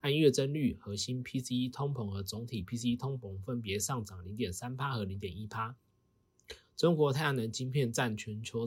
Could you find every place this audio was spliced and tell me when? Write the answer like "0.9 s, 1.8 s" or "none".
6.6 s